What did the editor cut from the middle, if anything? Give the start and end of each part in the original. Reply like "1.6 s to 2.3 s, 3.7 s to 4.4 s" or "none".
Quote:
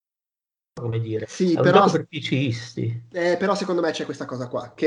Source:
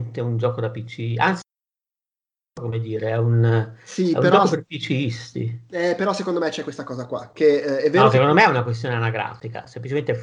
3.0 s to 3.8 s

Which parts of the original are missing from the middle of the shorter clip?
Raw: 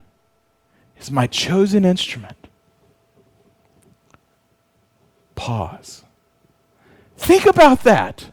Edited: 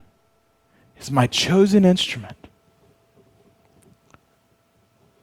none

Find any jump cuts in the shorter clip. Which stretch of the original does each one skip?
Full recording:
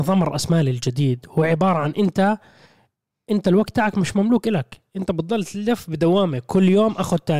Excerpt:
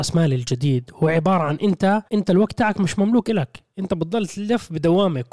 2.4 s to 3.2 s

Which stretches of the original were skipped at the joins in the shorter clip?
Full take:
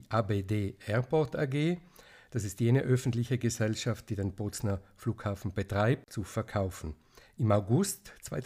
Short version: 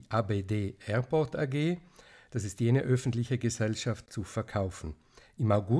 4.1 s to 6.1 s

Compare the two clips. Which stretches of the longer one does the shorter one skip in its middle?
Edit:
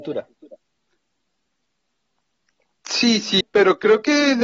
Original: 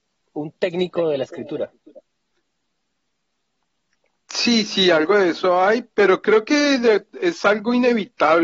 4.8 s to 5.8 s

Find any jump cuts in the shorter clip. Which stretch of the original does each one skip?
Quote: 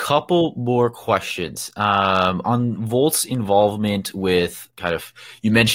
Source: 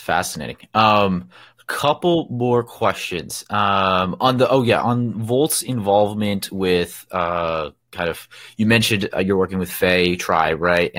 4.2 s to 4.8 s, 7.1 s to 7.8 s

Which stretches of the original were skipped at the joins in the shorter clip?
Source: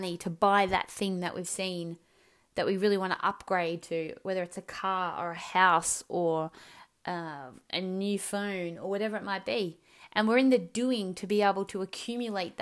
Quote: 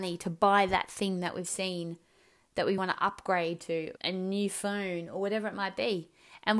2.8 s to 3.0 s, 4.2 s to 7.7 s

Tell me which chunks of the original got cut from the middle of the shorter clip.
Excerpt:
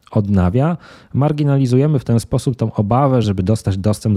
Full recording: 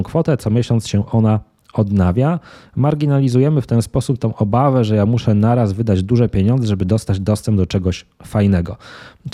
4.9 s to 6.7 s

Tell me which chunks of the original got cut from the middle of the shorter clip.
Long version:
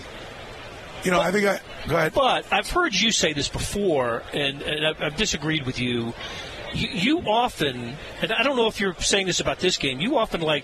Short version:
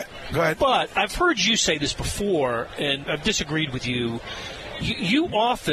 4.6 s to 5.0 s

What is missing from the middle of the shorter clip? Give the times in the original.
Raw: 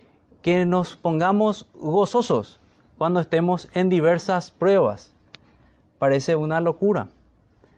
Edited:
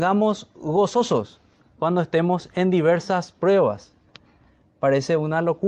none

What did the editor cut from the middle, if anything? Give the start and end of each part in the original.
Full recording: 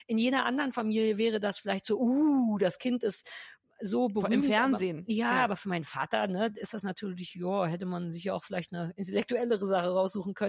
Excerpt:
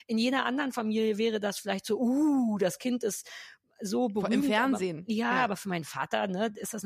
none

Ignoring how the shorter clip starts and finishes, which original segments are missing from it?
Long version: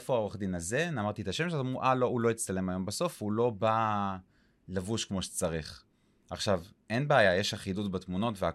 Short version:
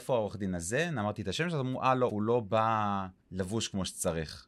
2.1 s to 3.2 s, 4.3 s to 4.6 s

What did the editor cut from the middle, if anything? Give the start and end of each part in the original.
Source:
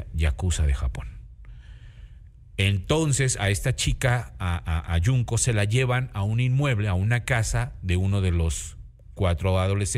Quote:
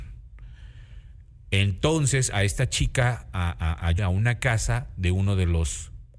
5.0 s to 6.8 s

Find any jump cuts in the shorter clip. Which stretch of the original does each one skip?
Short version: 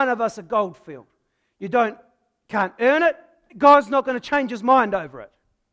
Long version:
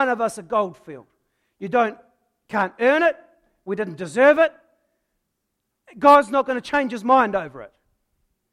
3.5 s to 5.9 s

